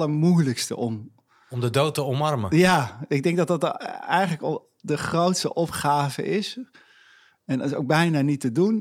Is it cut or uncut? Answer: uncut